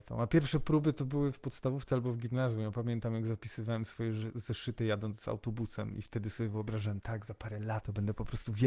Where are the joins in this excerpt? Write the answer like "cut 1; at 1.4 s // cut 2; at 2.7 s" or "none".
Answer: none